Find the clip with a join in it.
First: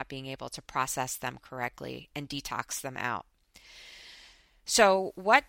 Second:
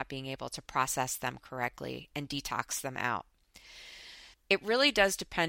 second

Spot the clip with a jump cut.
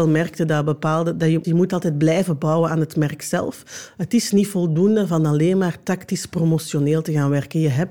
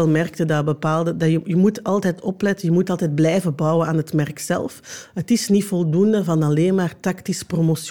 first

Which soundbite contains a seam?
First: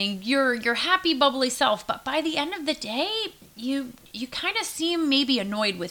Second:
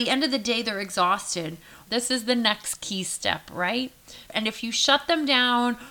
second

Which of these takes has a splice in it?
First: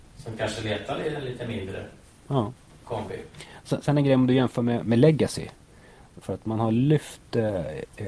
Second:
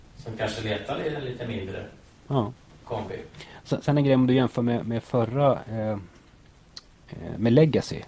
first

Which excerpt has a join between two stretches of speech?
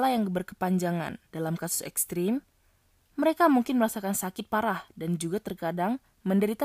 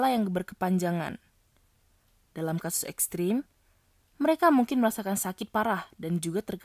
first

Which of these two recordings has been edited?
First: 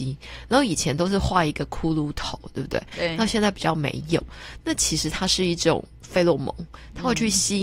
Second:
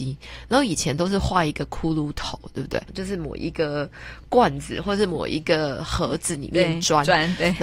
second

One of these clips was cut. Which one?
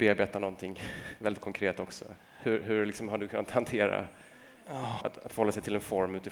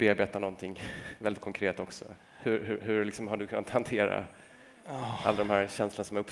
first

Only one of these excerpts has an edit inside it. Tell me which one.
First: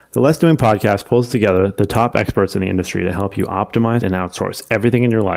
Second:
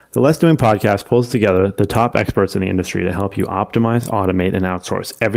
first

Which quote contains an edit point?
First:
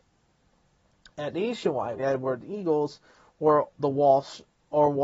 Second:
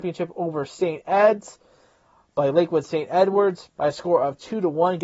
first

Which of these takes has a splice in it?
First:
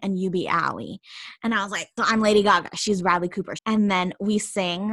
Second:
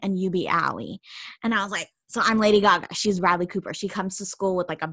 first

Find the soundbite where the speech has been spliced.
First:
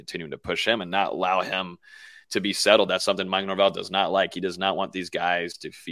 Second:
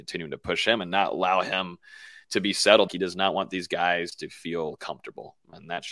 second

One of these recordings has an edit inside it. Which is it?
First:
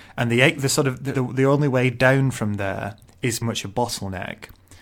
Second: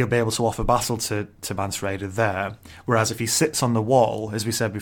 first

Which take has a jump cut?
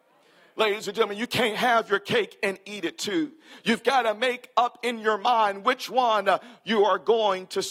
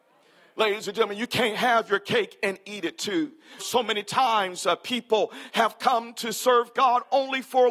second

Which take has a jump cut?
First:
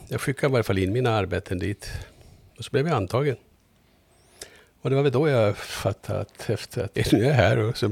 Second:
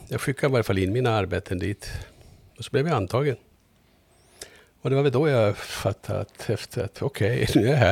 first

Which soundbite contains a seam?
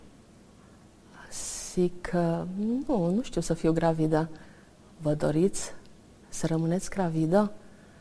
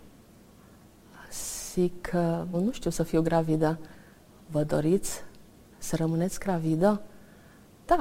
second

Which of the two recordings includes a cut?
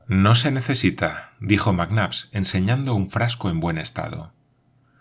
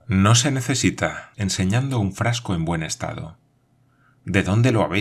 second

